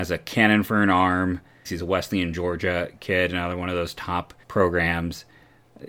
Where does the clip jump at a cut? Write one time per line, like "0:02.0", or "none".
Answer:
0:01.7
0:04.4